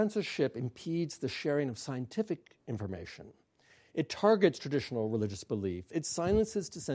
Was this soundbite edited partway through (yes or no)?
no